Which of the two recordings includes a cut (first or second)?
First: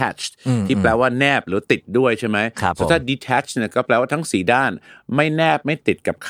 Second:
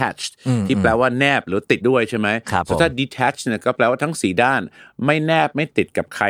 second